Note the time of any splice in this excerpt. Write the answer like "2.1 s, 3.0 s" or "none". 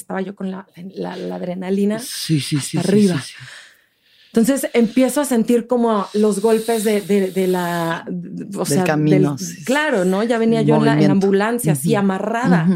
none